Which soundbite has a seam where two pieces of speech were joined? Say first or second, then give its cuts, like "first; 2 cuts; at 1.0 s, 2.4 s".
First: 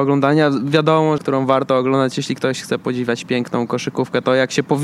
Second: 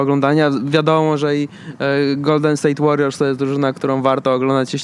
first; 1 cut; at 1.2 s